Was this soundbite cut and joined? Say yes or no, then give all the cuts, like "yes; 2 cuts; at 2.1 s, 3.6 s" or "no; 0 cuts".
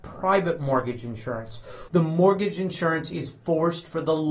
yes; 1 cut; at 1.9 s